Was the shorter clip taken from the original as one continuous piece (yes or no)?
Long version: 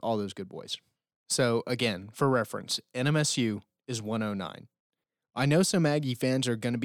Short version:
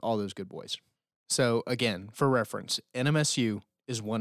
yes